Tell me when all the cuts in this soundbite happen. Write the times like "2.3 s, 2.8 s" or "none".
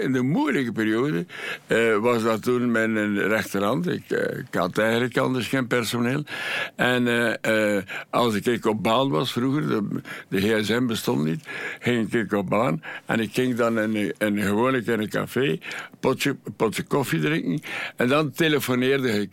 none